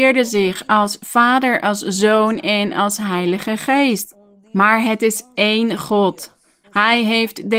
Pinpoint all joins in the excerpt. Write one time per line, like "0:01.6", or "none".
0:06.6